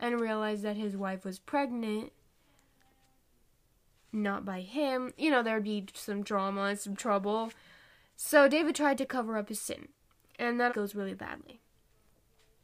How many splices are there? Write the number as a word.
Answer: one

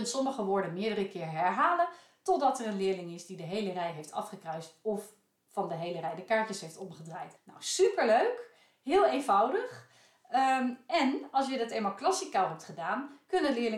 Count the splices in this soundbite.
one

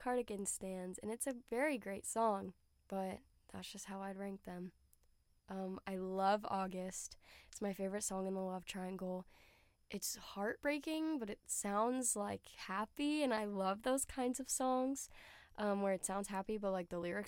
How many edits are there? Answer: zero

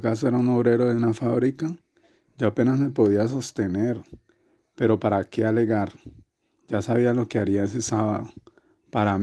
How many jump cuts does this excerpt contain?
zero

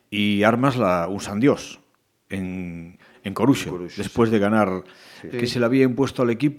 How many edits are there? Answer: one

